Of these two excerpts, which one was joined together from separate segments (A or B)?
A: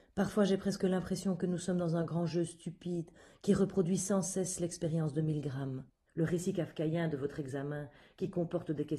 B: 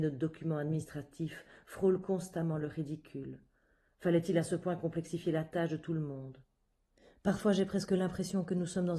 A